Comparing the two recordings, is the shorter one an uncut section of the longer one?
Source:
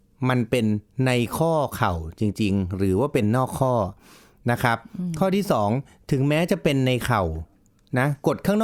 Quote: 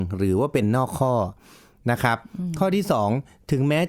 yes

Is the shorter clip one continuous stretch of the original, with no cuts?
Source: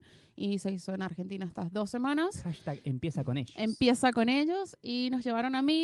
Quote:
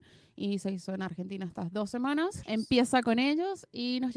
no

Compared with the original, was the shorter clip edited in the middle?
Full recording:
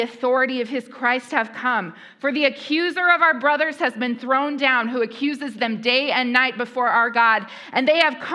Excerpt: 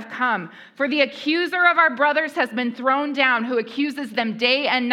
no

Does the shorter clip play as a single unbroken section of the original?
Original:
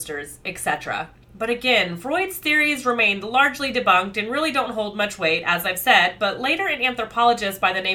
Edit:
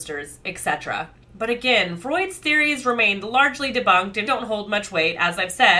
no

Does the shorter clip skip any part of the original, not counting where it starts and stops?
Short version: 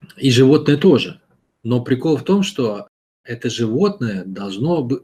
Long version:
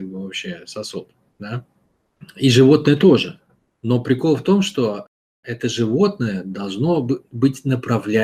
no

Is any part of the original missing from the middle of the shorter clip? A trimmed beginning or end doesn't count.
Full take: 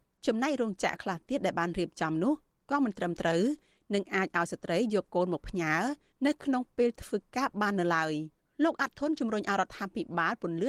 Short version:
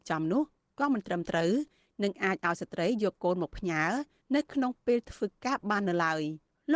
no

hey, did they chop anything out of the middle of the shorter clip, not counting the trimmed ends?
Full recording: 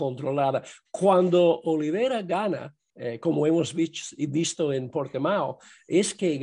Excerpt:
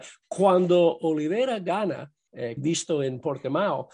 yes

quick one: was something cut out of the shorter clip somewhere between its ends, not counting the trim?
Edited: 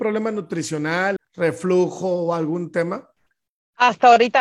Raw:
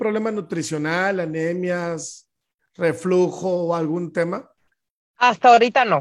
yes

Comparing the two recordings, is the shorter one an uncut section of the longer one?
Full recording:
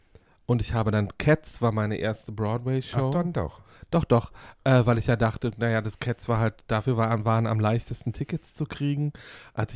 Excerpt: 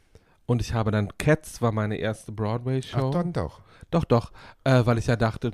yes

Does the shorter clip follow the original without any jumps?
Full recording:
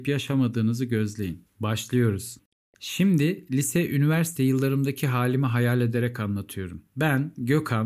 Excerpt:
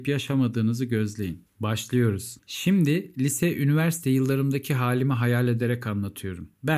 no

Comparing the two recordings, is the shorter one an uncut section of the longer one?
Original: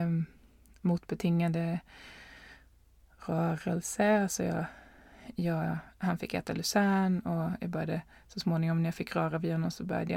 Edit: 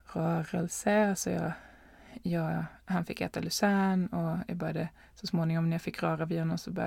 yes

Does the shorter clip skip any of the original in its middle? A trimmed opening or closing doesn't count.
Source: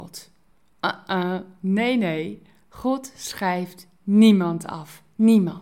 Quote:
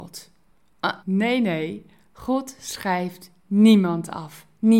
yes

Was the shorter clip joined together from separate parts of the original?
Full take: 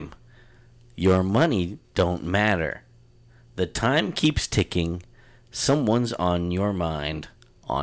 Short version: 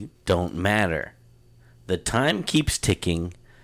no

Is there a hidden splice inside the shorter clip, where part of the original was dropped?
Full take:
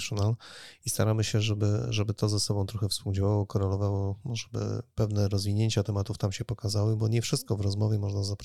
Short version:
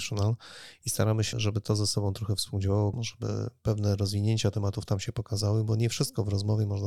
yes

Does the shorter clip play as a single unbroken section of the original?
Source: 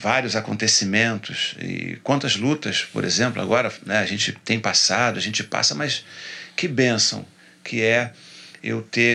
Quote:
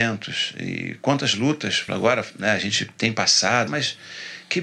no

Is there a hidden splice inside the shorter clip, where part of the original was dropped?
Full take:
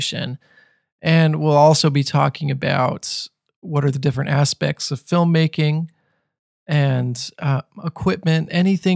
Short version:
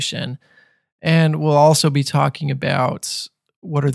no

